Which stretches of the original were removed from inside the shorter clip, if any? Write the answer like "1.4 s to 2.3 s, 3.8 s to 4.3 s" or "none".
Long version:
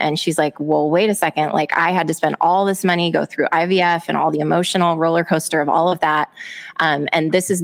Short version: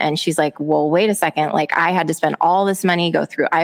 none